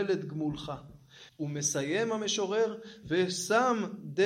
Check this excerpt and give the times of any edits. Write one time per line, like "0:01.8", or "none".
0:01.3
0:03.0